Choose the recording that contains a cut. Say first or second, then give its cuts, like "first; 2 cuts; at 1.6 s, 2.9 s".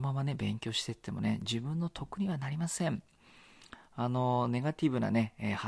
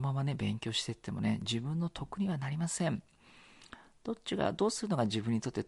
first; 1 cut; at 3.9 s